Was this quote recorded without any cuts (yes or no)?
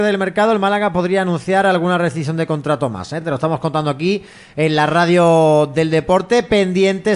yes